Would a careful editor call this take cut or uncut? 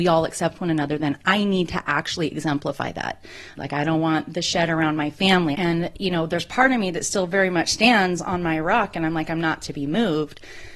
cut